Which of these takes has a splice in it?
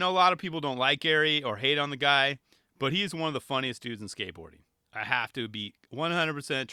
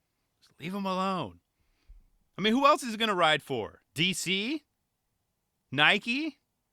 second; 1 cut; at 3.9 s

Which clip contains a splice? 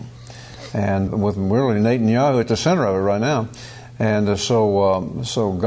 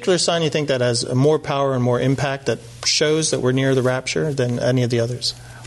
first; 1 cut; at 1.1 s

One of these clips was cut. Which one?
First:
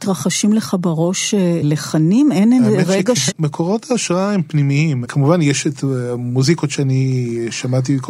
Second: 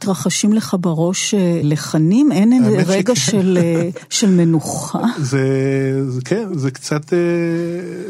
first; 2 cuts; at 3.3 s, 5.1 s

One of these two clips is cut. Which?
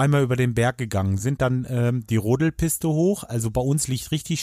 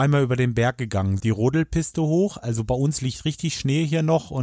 second; 1 cut; at 1.2 s

